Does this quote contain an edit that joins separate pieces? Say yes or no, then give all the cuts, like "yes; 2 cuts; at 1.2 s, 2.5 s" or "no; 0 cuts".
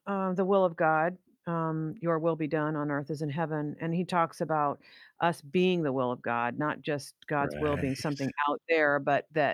no; 0 cuts